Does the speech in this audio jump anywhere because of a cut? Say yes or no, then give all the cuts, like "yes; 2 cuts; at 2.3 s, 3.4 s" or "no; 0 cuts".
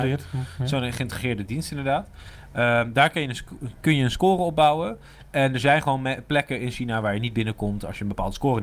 no; 0 cuts